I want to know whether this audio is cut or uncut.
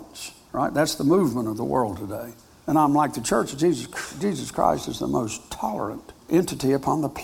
uncut